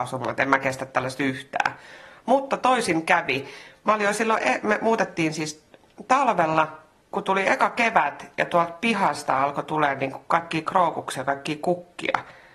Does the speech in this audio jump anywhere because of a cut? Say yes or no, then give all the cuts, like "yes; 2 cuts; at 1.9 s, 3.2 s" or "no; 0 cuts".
no; 0 cuts